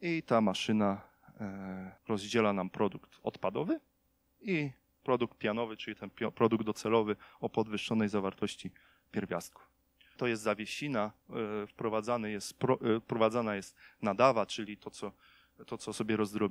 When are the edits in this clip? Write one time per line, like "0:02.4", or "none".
0:02.0
0:10.2

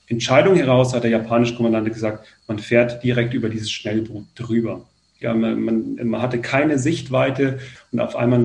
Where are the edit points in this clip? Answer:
0:05.2

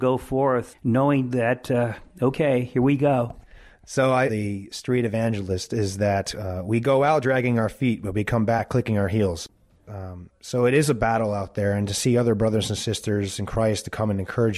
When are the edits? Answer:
0:04.3
0:09.9

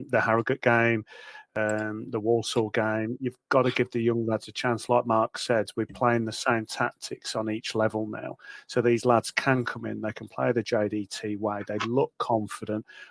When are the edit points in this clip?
none

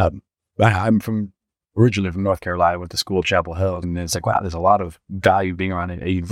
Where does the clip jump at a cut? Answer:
0:03.8

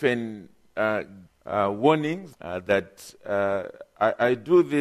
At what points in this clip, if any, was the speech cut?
0:01.3
0:02.3

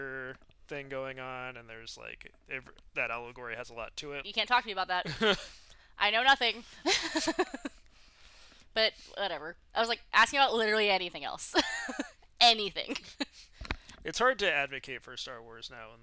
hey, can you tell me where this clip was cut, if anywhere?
0:04.2

